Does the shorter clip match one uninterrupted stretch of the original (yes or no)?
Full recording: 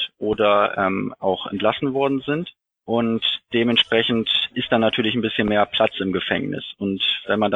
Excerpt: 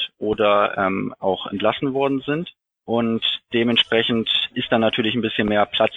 yes